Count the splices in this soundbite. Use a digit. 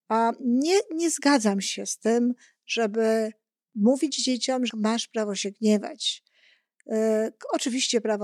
1